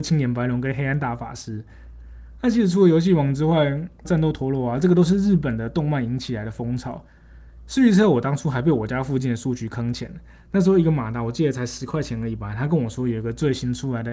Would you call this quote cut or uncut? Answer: cut